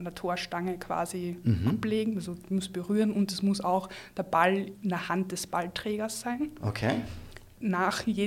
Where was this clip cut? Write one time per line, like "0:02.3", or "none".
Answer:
0:04.8